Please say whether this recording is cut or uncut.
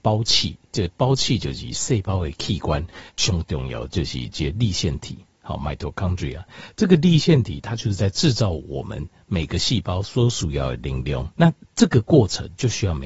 cut